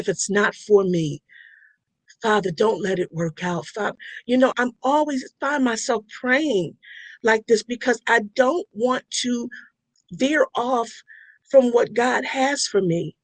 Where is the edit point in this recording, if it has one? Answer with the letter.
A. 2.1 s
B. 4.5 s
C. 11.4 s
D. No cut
B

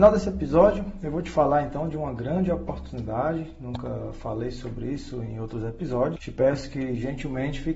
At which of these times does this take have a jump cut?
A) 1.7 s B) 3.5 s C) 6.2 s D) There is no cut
C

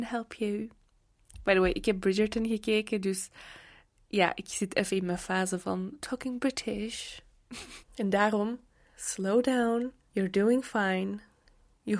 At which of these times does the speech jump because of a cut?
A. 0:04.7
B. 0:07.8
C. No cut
B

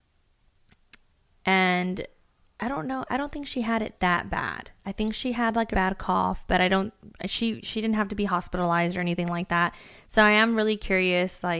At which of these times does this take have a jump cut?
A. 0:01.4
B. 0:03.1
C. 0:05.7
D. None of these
C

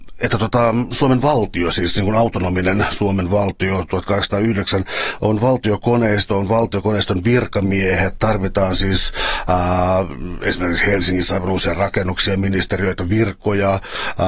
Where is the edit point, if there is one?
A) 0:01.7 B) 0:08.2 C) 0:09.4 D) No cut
D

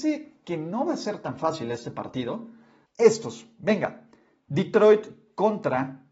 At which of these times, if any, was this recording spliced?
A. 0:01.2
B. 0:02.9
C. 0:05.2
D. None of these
B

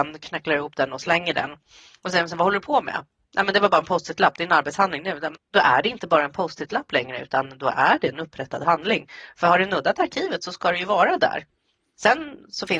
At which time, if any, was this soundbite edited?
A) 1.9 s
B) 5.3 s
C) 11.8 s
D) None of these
B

